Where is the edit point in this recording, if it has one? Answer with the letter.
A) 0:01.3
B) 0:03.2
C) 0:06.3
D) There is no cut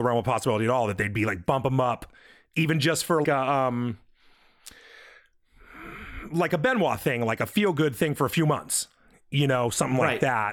B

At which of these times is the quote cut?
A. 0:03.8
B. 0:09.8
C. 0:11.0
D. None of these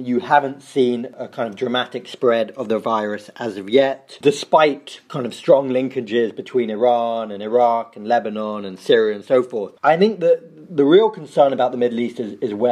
B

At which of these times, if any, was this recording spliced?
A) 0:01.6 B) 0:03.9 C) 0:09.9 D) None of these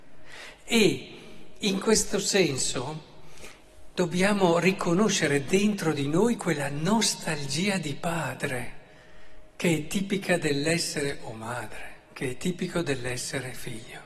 B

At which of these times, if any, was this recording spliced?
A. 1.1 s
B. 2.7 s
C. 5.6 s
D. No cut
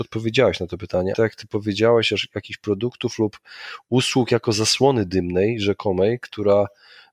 A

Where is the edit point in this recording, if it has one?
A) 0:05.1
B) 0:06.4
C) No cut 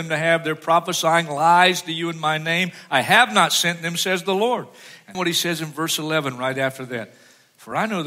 A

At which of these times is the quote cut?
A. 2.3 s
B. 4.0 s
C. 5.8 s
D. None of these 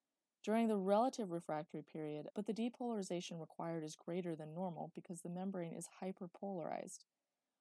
A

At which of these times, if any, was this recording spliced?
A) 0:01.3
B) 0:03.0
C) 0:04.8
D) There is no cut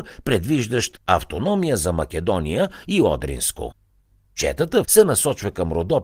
C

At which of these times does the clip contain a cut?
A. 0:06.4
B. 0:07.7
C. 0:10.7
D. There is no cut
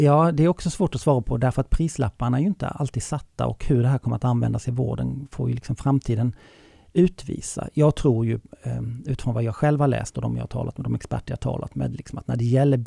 D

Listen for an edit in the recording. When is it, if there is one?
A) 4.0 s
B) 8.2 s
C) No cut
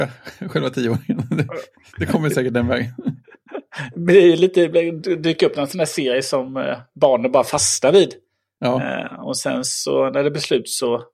C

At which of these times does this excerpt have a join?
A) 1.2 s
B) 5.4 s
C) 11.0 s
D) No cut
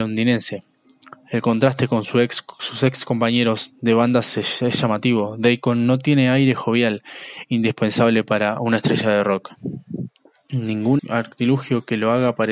C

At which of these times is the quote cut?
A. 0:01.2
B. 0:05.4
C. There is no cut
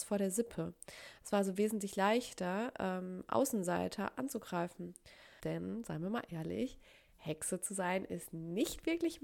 B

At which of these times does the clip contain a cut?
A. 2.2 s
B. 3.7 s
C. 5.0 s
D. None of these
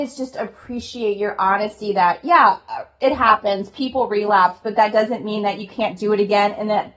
D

